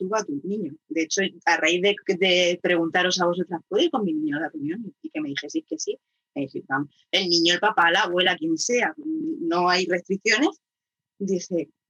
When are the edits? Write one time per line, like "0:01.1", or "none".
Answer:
none